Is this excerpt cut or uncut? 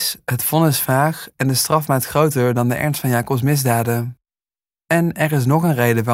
uncut